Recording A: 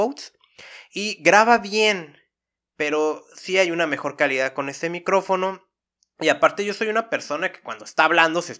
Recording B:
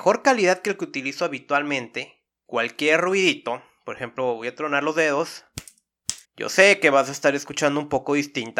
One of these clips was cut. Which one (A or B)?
B